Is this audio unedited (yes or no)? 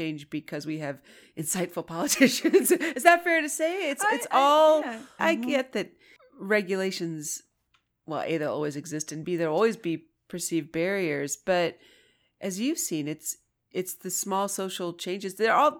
no